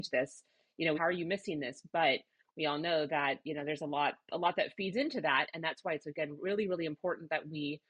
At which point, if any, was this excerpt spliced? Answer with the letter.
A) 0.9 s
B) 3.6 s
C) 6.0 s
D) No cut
A